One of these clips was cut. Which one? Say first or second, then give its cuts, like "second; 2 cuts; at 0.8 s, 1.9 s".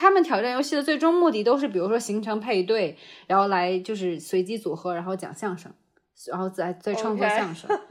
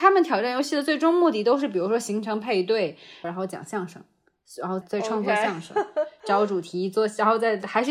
second; 2 cuts; at 3.2 s, 4.8 s